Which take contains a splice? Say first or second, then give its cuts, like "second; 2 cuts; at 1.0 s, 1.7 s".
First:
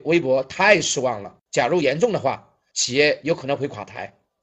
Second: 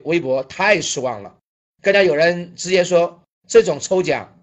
first; 2 cuts; at 1.5 s, 2.7 s